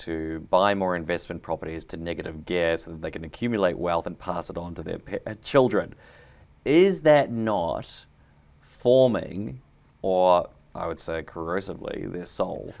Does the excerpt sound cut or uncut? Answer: uncut